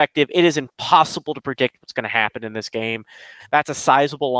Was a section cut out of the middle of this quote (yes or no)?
yes